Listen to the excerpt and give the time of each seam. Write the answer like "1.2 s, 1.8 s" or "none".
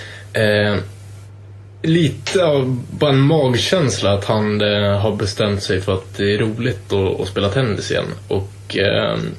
none